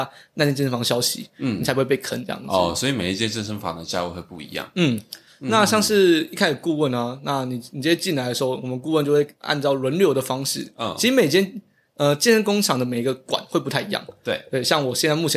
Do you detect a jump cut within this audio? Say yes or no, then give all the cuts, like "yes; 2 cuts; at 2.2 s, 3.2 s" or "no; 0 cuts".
no; 0 cuts